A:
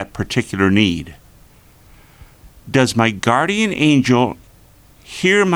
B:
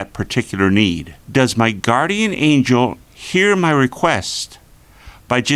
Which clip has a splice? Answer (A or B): B